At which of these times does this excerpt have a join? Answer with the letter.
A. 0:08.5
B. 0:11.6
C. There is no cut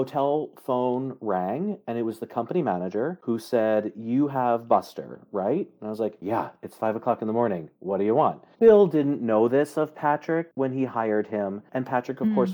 A